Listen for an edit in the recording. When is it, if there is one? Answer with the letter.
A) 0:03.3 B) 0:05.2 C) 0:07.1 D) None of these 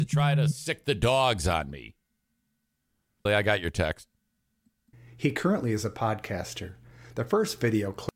A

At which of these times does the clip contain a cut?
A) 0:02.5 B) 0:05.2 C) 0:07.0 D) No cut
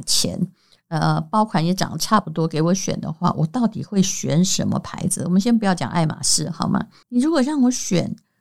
C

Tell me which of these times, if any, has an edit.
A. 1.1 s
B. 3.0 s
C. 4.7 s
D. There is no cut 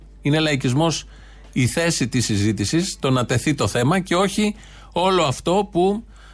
D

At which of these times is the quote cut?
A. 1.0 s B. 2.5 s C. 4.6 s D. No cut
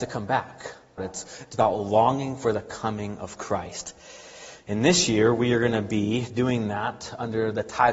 A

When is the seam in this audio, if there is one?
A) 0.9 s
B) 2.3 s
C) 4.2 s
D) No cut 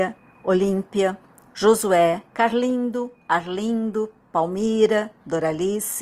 B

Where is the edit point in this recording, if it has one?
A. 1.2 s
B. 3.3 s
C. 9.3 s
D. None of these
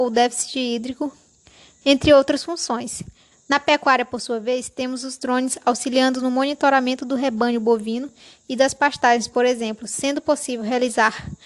B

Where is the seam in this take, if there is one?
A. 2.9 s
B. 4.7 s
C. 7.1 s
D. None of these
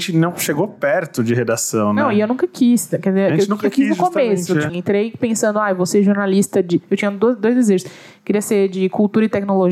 B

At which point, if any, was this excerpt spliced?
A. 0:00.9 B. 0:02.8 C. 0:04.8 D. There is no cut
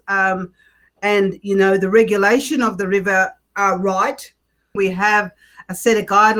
C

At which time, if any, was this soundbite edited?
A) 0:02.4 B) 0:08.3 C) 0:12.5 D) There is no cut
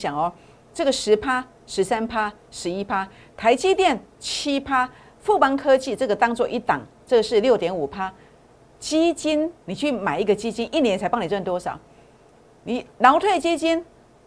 D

